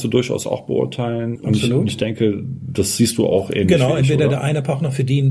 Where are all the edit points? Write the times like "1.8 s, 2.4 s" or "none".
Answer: 1.4 s